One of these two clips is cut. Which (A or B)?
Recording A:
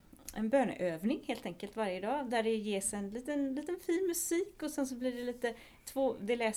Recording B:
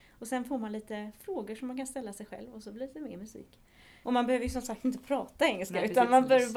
B